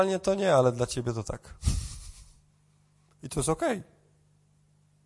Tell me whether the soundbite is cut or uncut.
cut